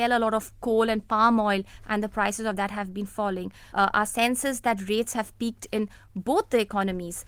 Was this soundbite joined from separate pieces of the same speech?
yes; 1 cut; at 3.7 s

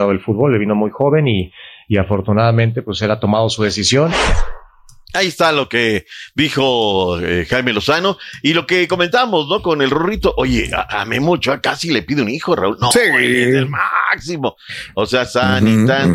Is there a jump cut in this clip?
no; 0 cuts

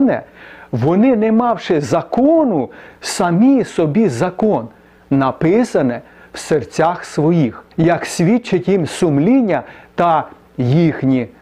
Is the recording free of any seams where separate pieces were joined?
no; 2 cuts; at 5.0 s, 7.7 s

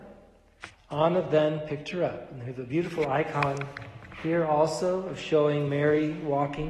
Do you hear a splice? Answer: no; 0 cuts

